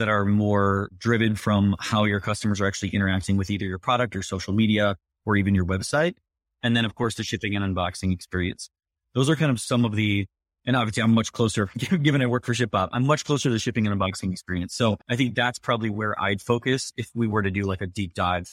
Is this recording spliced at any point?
yes; 1 cut; at 15.0 s

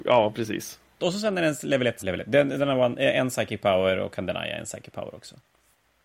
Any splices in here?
yes; 2 cuts; at 1.0 s, 2.0 s

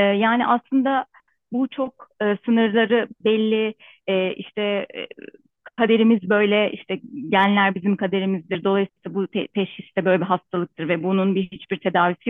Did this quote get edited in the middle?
no; 0 cuts

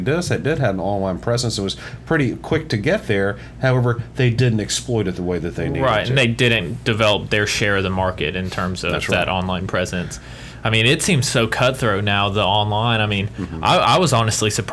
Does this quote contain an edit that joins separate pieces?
no; 0 cuts

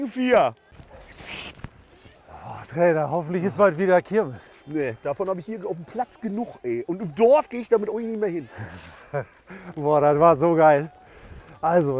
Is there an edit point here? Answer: no; 0 cuts

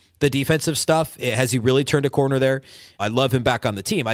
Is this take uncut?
no; 1 cut; at 3.0 s

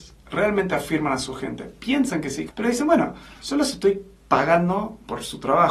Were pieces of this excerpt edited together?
yes; 1 cut; at 2.5 s

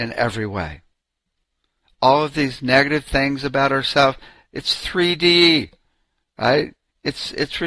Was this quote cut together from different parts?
no; 0 cuts

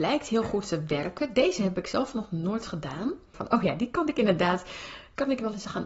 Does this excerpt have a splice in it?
yes; 1 cut; at 3.3 s

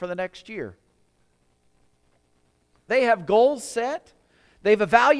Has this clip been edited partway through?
yes; 1 cut; at 2.9 s

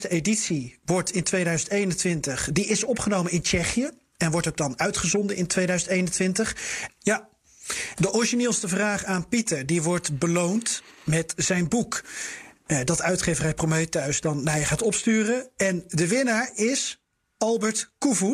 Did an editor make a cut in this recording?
yes; 1 cut; at 6.9 s

